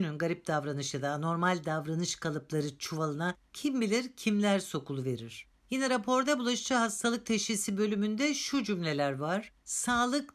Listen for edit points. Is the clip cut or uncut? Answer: uncut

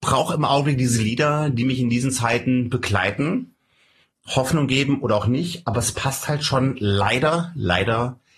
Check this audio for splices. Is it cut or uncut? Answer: uncut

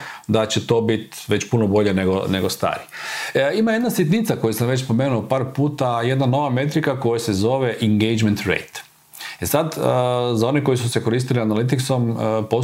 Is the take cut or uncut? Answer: uncut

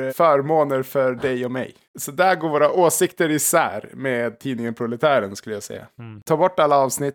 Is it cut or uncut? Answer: cut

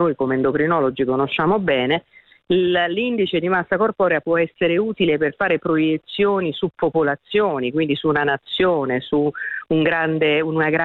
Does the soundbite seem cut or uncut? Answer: uncut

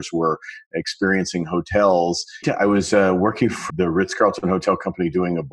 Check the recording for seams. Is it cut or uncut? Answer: cut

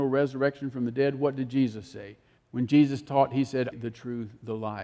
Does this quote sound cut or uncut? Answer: cut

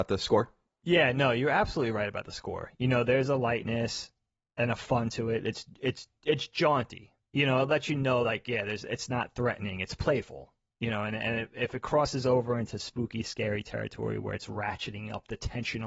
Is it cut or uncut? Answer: uncut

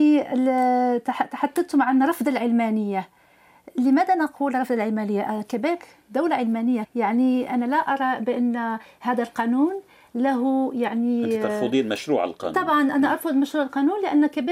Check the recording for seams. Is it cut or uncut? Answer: cut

